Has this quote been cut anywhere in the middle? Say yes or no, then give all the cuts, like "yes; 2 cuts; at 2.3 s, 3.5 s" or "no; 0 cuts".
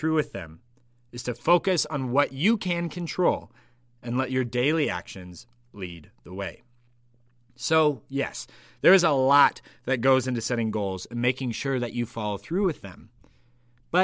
no; 0 cuts